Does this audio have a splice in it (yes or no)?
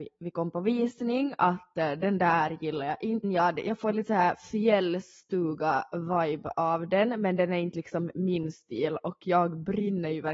yes